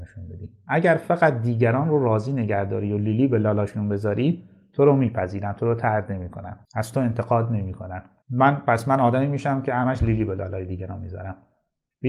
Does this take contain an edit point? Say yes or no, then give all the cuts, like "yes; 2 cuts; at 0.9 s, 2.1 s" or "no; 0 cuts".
yes; 1 cut; at 6.6 s